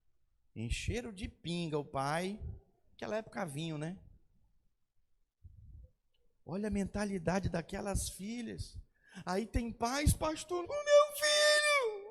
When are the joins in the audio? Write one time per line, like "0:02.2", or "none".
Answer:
0:10.6